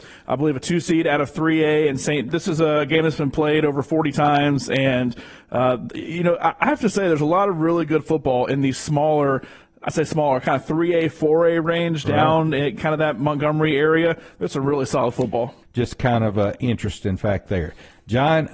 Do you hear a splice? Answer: yes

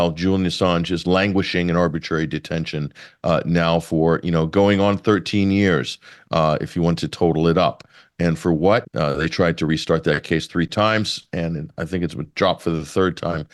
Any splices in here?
yes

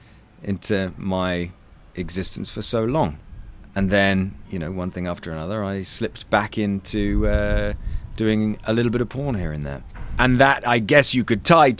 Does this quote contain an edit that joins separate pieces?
no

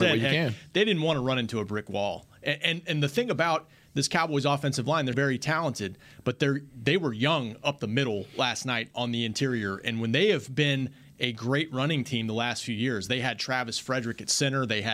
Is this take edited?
yes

